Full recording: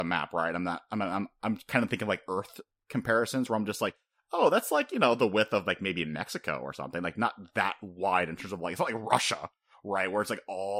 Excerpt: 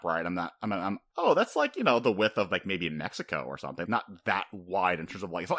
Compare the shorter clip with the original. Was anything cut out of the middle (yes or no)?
yes